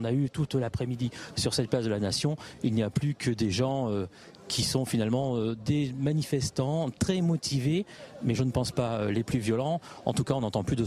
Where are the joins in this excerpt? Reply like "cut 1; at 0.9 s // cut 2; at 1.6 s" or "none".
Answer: none